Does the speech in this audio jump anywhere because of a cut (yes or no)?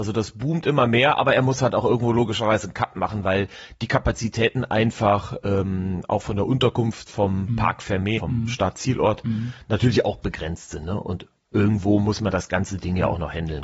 yes